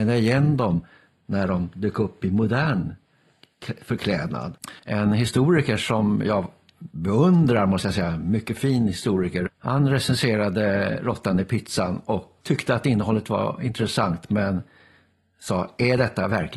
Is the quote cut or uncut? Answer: cut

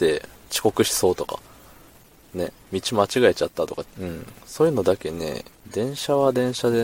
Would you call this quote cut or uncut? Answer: cut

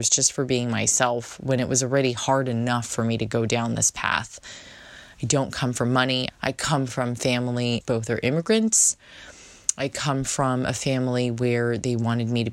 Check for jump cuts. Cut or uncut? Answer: cut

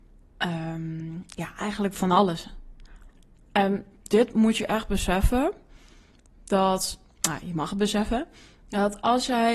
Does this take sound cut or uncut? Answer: uncut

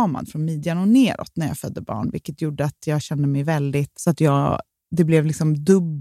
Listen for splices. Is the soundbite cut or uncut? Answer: cut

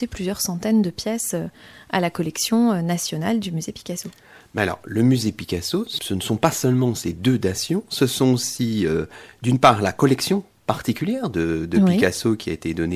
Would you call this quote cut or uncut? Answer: uncut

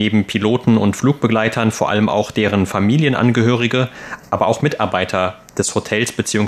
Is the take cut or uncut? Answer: uncut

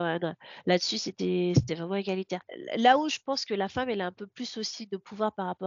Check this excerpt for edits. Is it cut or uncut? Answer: uncut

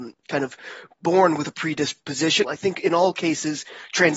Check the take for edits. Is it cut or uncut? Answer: cut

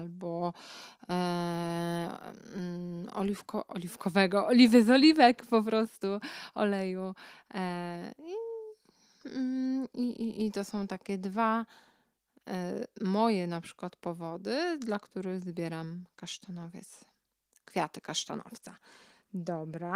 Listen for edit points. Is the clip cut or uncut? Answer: uncut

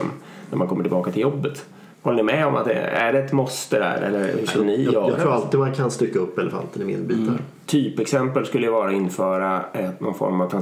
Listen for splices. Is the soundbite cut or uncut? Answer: cut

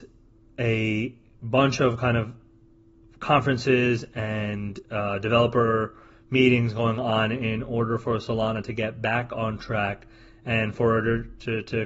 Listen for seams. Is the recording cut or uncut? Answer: uncut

